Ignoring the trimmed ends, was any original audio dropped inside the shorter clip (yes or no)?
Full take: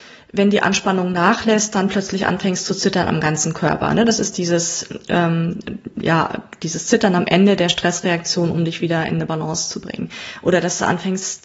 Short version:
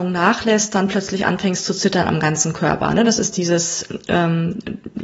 no